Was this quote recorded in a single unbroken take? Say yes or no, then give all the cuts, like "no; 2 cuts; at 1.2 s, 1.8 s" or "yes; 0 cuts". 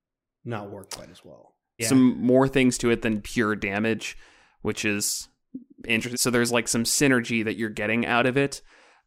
no; 3 cuts; at 1.8 s, 3.2 s, 6.1 s